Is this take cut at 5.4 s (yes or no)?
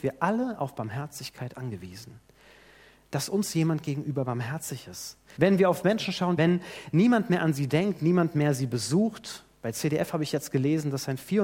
yes